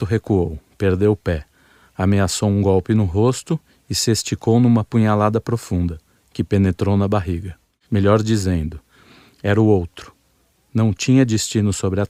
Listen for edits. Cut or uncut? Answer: cut